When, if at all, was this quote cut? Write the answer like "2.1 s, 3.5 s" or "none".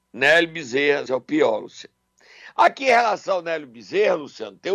1.1 s